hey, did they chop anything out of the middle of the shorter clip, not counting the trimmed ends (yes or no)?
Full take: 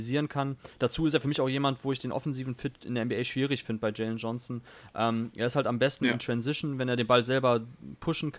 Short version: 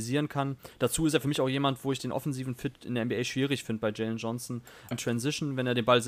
yes